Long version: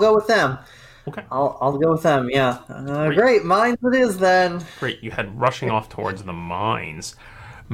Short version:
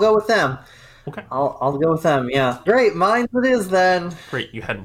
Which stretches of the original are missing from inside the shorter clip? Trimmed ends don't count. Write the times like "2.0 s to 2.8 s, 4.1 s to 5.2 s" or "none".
2.7 s to 3.1 s